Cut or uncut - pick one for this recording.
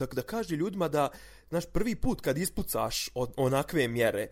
uncut